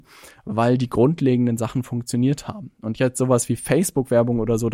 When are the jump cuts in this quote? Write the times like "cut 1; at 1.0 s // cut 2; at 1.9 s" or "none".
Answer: none